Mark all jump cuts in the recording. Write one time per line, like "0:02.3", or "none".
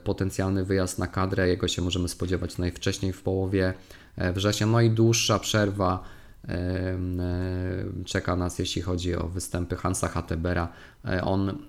none